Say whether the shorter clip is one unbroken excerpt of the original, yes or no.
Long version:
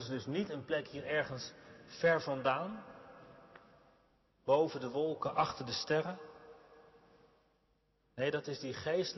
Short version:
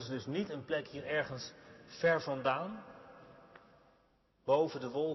yes